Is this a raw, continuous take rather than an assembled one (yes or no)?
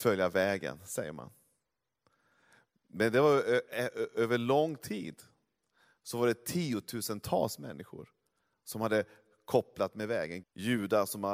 no